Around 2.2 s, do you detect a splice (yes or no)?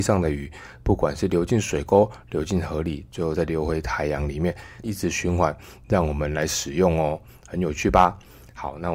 no